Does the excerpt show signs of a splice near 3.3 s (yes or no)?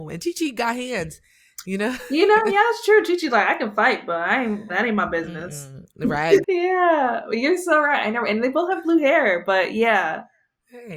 no